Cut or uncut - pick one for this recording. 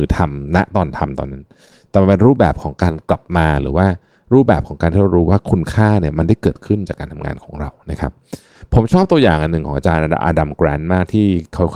uncut